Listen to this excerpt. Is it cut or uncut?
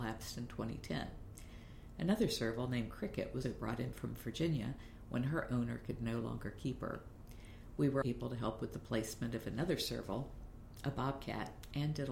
cut